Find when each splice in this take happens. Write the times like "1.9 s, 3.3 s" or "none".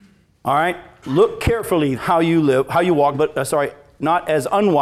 1.9 s, 3.1 s